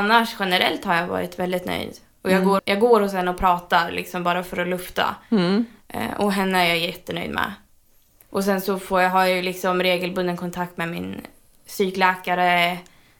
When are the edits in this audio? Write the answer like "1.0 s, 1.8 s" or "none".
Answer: 2.6 s